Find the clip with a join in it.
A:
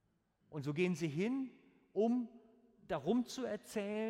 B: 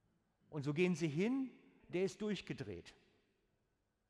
B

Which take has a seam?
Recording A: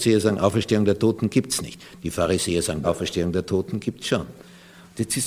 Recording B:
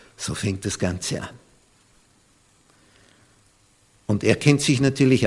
A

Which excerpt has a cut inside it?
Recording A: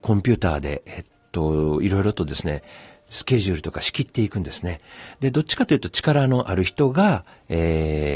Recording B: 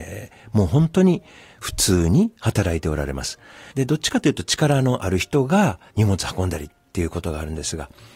B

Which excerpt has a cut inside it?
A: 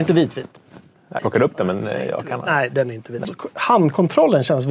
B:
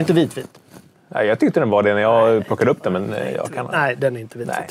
A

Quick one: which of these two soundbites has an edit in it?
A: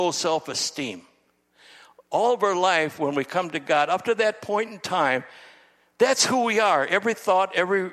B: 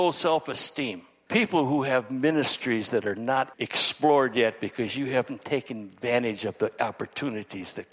B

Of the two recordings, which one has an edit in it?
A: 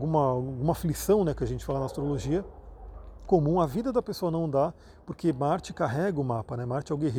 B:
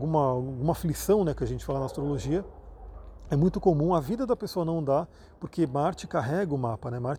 A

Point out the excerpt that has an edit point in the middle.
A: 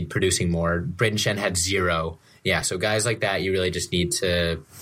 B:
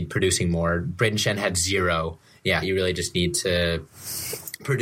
B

